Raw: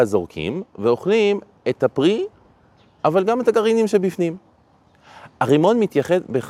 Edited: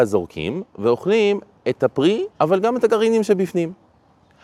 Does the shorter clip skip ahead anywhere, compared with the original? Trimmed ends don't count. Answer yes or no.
yes